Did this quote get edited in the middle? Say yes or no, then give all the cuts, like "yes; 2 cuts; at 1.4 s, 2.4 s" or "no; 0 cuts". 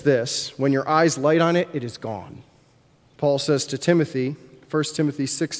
yes; 1 cut; at 3.1 s